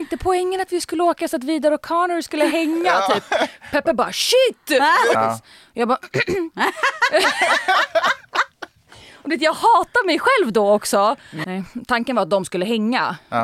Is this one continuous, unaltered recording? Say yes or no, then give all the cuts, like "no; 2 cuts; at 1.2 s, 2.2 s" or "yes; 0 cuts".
no; 2 cuts; at 5.1 s, 11.4 s